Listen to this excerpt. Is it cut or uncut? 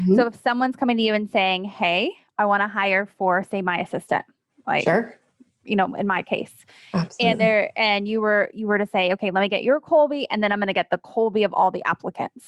uncut